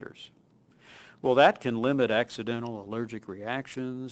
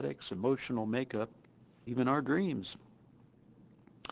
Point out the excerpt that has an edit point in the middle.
second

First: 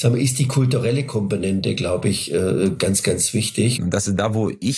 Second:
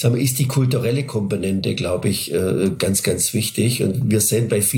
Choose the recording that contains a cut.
first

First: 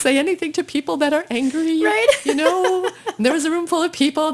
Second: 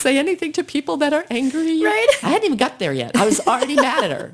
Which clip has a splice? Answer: second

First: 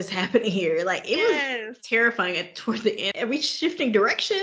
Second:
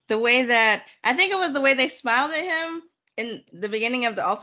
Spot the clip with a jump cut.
first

